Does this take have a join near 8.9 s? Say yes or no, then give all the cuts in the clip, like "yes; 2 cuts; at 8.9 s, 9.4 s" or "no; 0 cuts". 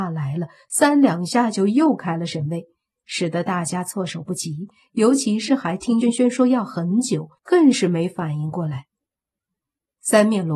no; 2 cuts; at 6.0 s, 7.4 s